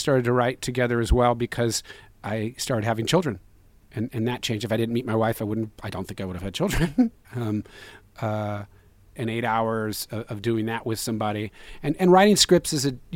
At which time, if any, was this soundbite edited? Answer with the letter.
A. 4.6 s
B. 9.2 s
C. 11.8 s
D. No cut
B